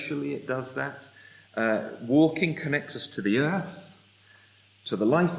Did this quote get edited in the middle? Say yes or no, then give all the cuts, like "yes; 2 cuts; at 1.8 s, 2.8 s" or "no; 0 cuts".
no; 0 cuts